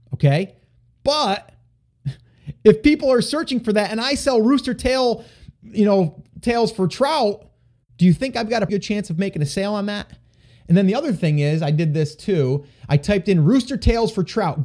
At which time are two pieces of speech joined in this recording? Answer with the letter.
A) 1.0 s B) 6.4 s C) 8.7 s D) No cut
C